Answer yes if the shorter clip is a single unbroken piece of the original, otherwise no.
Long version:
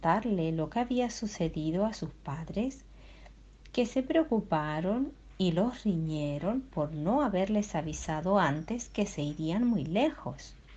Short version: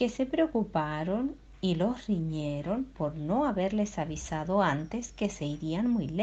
yes